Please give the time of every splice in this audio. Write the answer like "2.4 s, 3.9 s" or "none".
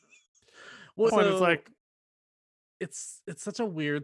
1.1 s